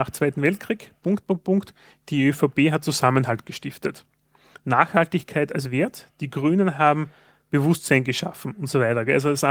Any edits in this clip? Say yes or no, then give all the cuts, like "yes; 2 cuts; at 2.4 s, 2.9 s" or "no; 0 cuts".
no; 0 cuts